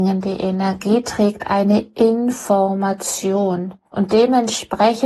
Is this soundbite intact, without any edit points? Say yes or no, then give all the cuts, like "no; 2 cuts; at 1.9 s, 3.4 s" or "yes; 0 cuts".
no; 1 cut; at 3.8 s